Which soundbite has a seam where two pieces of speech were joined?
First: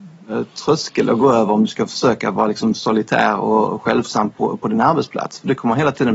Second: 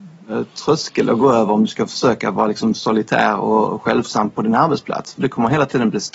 second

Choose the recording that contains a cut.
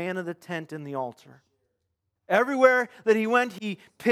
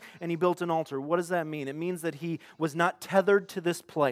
first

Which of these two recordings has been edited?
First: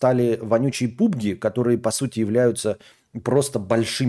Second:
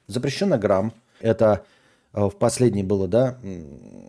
second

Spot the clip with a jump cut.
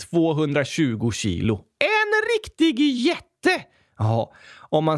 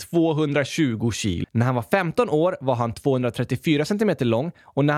second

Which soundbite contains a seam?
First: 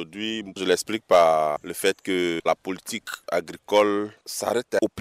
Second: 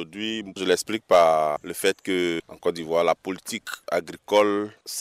first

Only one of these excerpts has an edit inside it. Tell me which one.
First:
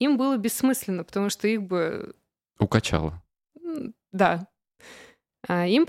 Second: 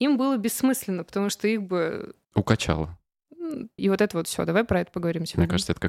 second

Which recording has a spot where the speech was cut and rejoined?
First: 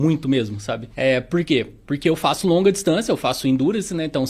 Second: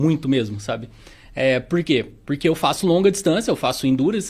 first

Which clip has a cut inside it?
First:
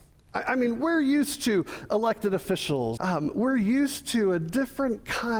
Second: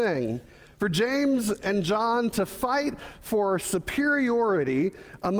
first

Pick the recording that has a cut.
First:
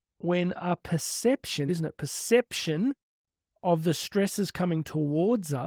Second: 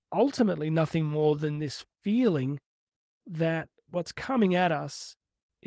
first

